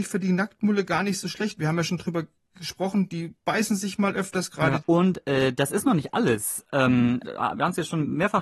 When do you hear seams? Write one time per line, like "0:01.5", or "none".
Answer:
0:04.8
0:07.2